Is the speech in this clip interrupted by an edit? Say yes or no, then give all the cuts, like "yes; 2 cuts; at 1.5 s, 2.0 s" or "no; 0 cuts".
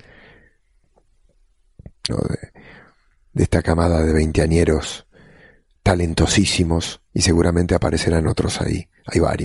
yes; 2 cuts; at 2.1 s, 7.1 s